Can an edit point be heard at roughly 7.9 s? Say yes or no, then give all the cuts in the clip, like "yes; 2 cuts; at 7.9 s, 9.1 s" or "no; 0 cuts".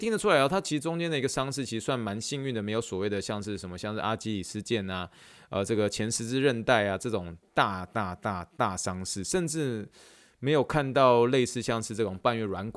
yes; 1 cut; at 7.9 s